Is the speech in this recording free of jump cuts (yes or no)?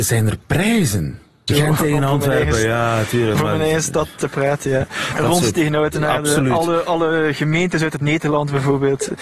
no